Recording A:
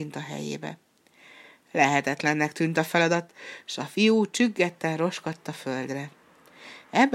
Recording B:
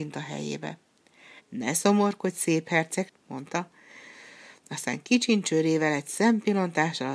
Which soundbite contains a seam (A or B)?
B